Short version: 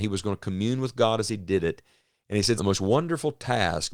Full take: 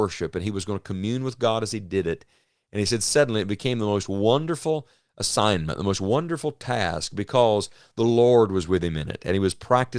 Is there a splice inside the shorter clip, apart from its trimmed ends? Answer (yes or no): yes